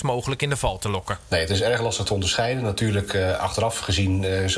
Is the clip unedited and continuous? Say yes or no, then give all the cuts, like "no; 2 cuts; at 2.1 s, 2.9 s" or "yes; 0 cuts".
yes; 0 cuts